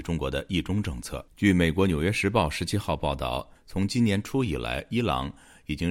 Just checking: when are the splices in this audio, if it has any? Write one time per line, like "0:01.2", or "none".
0:01.3
0:03.6